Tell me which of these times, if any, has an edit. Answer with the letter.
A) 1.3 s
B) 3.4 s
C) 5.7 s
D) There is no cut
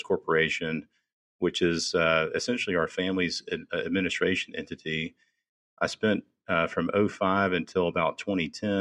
C